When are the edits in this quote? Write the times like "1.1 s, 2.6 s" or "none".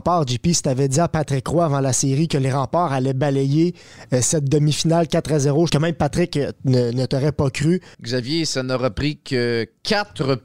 5.7 s, 7.9 s